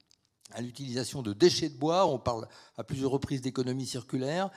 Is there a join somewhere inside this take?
no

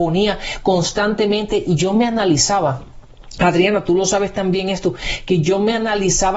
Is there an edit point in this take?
no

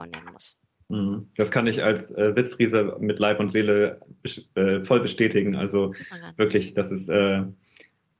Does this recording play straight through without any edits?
yes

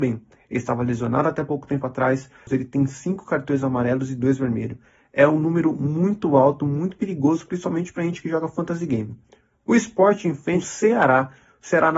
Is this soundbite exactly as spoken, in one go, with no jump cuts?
yes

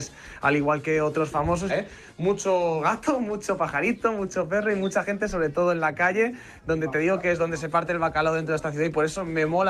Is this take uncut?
no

